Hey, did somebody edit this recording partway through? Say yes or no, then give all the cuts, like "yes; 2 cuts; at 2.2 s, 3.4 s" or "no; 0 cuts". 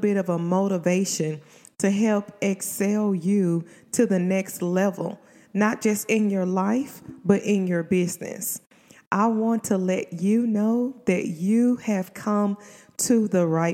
no; 0 cuts